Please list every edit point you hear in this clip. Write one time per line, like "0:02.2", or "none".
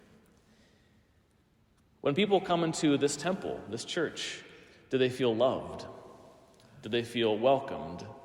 none